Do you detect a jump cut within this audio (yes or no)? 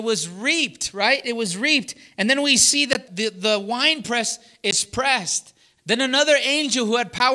yes